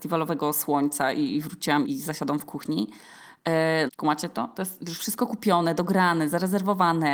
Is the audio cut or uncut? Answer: cut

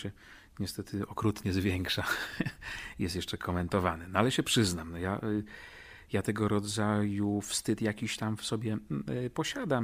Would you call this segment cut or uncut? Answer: uncut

